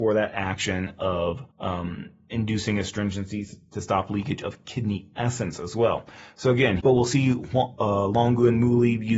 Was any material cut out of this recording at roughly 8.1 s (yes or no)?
no